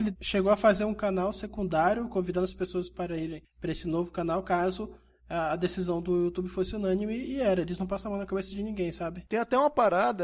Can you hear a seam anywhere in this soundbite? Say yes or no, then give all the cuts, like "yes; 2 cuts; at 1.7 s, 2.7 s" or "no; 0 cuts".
no; 0 cuts